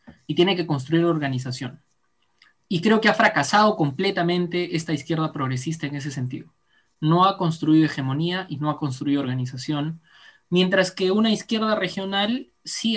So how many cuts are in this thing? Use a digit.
0